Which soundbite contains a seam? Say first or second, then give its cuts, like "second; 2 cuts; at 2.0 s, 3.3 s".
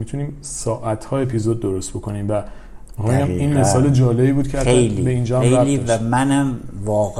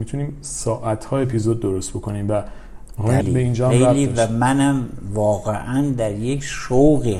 second; 1 cut; at 3.2 s